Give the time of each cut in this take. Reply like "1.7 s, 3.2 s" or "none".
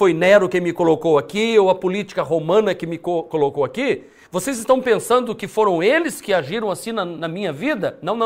none